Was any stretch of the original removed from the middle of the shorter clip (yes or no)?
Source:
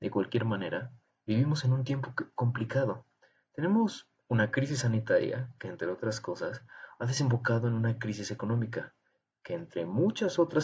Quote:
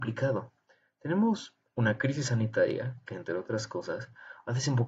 no